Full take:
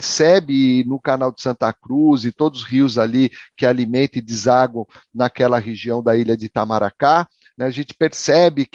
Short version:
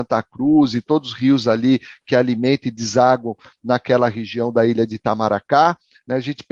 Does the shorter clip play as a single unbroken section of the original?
yes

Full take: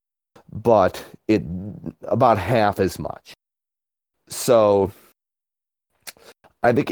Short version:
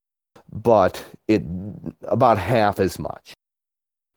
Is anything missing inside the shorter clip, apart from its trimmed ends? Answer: no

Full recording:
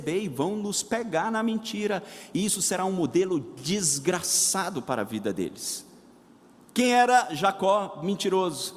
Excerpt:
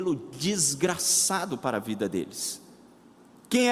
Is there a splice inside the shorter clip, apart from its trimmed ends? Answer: no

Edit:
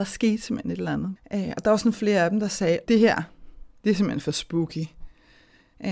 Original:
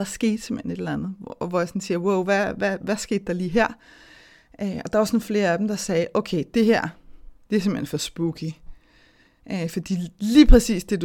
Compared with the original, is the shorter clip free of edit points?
no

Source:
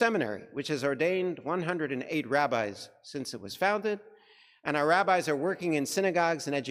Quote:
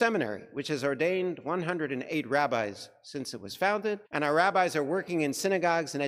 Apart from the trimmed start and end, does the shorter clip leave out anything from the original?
yes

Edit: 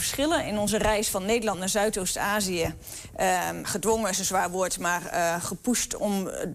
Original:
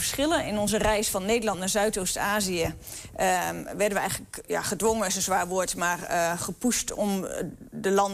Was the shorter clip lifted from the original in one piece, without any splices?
no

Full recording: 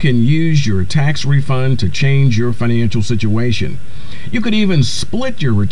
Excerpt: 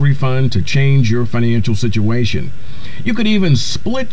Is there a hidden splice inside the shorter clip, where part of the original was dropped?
no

